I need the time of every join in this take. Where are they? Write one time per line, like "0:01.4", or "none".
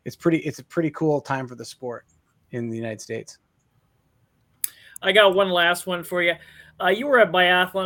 none